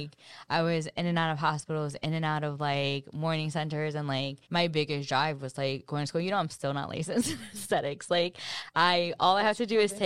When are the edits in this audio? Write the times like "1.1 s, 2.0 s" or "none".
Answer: 4.4 s